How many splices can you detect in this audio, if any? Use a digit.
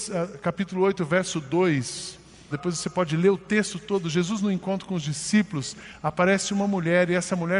1